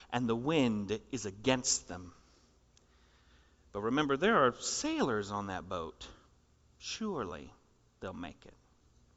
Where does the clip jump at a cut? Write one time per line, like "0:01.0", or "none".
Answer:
none